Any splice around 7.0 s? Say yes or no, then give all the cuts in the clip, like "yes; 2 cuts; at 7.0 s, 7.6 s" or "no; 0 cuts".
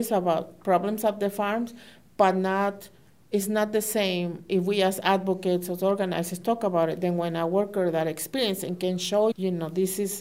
no; 1 cut; at 9.3 s